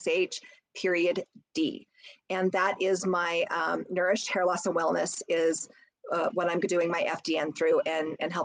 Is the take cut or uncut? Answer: uncut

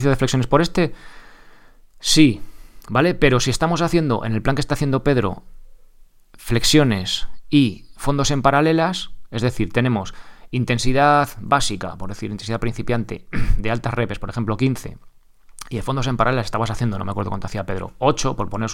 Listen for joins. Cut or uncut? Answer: uncut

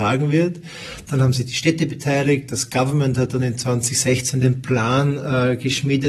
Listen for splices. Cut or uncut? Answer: uncut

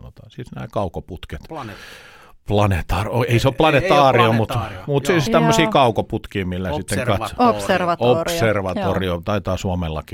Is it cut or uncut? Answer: uncut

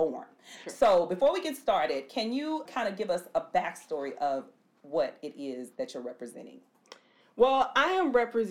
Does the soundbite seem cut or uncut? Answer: cut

